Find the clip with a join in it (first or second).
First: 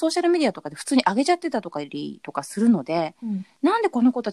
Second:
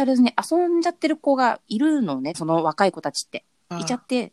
second